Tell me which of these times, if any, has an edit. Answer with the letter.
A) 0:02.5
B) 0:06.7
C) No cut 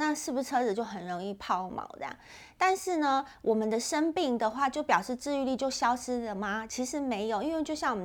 C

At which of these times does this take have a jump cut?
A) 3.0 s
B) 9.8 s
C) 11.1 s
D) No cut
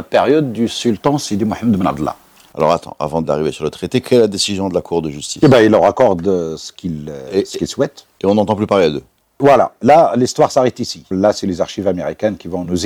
C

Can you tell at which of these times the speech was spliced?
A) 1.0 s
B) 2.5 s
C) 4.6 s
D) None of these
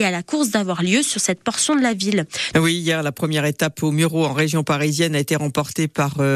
B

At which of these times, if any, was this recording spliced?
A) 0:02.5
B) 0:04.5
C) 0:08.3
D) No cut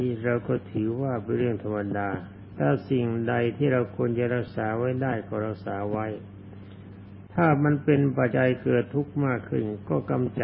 C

